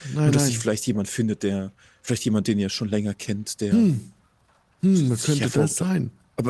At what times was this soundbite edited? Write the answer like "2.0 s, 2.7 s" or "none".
none

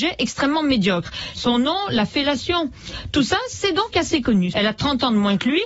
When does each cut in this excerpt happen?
1.4 s, 4.5 s

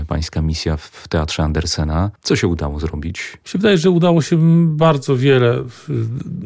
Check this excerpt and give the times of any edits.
2.1 s

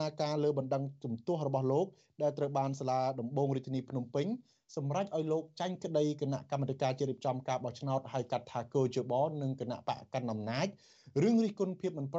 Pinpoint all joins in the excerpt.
none

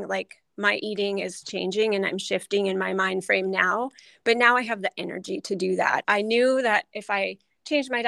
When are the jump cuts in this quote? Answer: 6.0 s

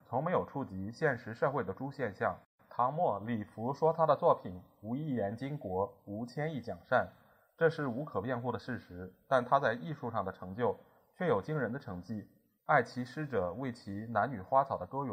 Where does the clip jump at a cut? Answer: 12.6 s

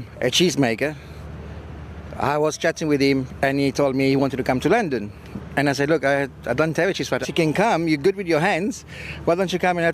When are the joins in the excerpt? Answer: 7.2 s

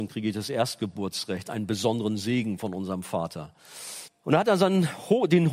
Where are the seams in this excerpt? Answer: 4.1 s

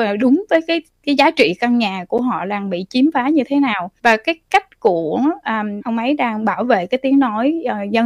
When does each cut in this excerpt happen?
4.0 s, 5.8 s

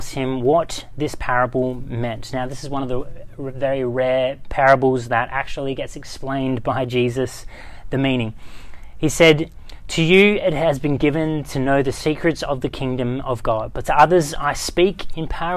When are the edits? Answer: none

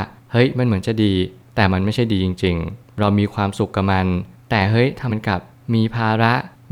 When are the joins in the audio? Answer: 5.1 s

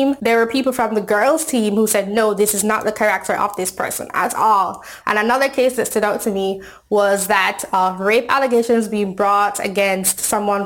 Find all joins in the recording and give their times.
5.0 s

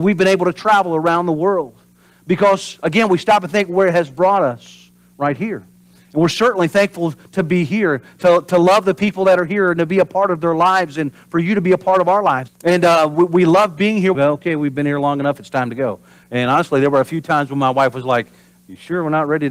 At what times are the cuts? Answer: 12.5 s, 14.1 s

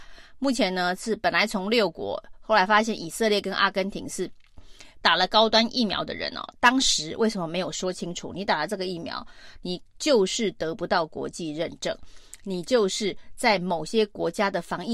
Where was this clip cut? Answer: 5.0 s

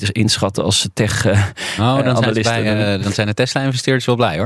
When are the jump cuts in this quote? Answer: none

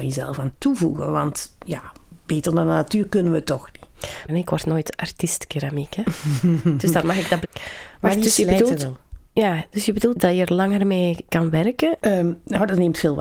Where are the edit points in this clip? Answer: 4.3 s, 7.4 s, 12.0 s

